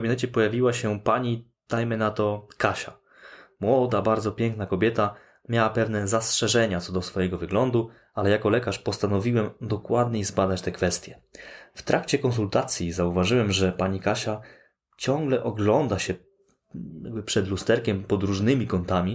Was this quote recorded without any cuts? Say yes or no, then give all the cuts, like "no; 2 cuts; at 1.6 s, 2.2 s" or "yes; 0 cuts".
yes; 0 cuts